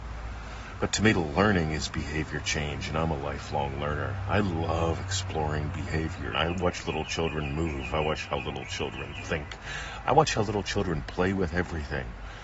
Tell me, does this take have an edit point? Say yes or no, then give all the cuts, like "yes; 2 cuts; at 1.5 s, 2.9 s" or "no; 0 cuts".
yes; 1 cut; at 6.3 s